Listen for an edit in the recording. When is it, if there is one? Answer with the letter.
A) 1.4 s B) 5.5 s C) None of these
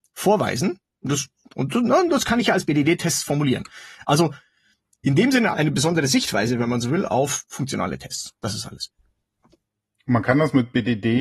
B